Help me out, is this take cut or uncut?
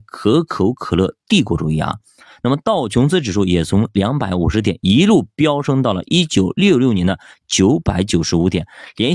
uncut